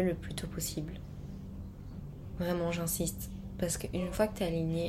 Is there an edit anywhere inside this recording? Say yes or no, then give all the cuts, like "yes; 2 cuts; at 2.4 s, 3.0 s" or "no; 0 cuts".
no; 0 cuts